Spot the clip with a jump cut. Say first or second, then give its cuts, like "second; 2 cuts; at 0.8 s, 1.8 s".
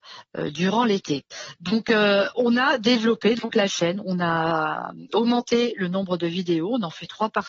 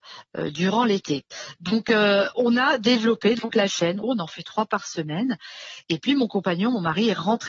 second; 1 cut; at 4.0 s